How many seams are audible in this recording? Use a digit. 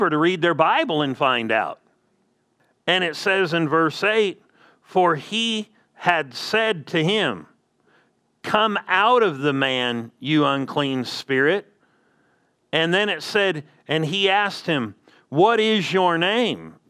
0